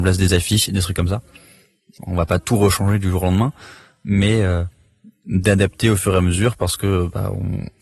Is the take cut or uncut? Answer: cut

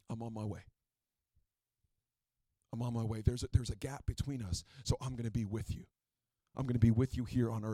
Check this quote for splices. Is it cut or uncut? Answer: uncut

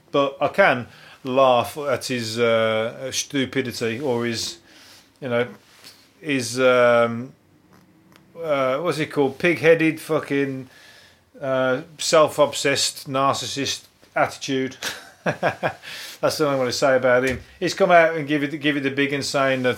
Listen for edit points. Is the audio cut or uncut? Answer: uncut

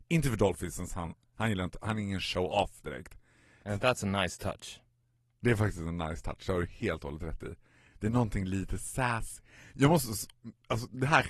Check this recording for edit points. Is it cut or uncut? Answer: cut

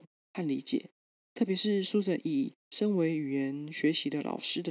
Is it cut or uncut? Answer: uncut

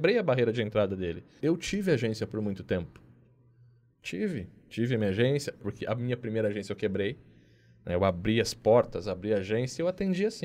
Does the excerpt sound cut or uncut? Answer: cut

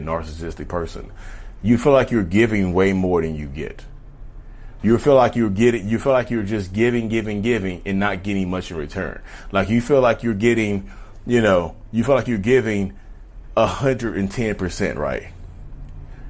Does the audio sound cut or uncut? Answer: uncut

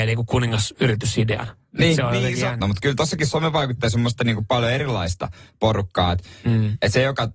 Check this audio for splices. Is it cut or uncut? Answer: cut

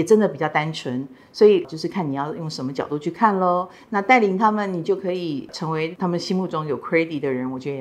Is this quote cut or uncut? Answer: uncut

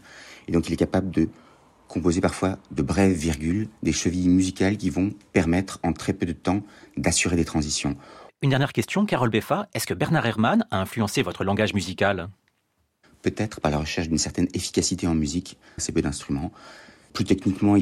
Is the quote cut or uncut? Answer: cut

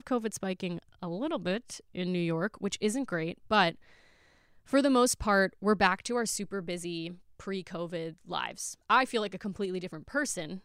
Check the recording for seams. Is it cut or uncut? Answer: cut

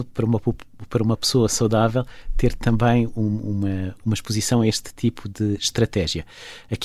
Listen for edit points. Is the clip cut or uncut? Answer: uncut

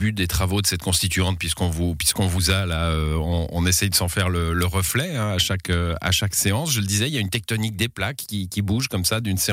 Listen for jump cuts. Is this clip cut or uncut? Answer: uncut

